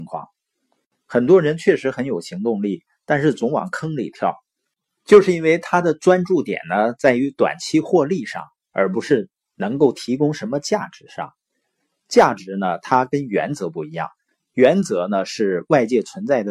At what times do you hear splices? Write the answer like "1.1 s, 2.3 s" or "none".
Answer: 0.9 s